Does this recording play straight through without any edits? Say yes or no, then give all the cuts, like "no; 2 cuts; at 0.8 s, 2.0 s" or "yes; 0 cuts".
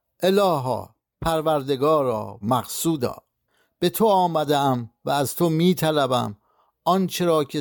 no; 1 cut; at 2.4 s